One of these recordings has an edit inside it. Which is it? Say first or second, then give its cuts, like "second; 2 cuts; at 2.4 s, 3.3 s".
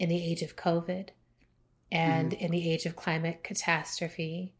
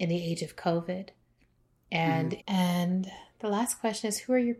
second; 1 cut; at 2.4 s